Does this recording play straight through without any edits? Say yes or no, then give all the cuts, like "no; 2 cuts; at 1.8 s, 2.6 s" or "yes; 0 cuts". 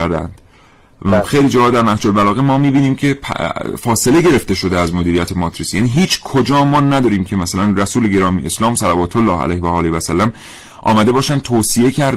yes; 0 cuts